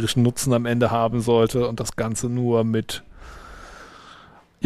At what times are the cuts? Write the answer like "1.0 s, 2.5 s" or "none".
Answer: none